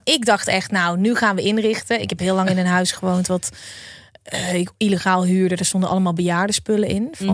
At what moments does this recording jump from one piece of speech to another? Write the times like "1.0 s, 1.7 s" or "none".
none